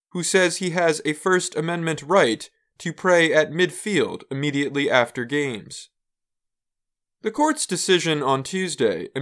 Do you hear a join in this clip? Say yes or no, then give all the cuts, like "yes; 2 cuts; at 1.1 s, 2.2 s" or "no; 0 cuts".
no; 0 cuts